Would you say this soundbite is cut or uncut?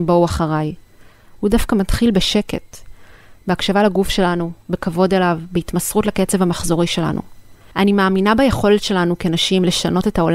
cut